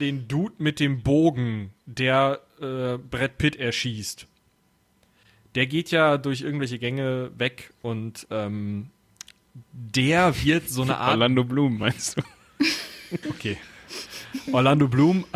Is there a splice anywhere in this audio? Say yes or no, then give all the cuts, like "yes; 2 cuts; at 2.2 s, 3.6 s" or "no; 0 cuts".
yes; 1 cut; at 13.2 s